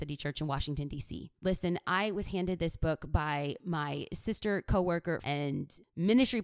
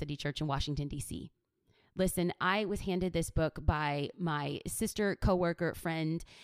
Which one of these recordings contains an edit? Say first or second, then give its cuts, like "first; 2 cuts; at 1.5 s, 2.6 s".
first; 2 cuts; at 1.4 s, 5.2 s